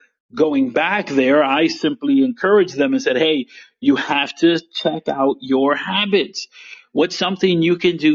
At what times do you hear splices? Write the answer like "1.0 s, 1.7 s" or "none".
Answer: none